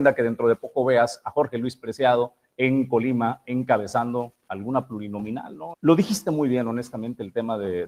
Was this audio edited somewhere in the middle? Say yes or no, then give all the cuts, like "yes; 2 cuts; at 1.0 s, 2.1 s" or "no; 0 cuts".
yes; 1 cut; at 5.7 s